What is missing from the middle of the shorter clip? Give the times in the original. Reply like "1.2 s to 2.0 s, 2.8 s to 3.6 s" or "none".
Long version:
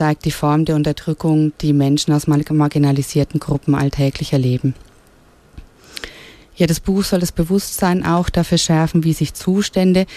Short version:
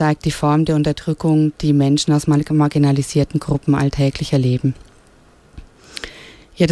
none